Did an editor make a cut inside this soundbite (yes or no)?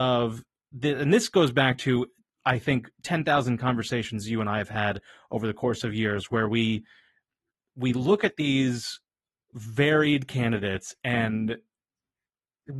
no